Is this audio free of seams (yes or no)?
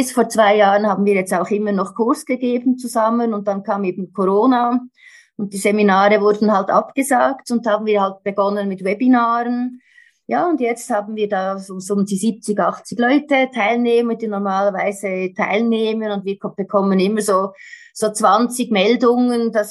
yes